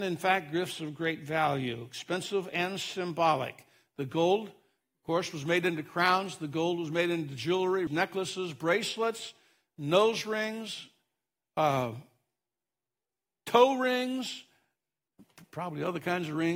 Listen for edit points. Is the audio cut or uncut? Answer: cut